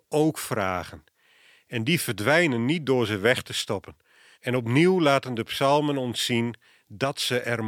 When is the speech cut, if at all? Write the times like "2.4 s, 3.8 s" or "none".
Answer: 4.3 s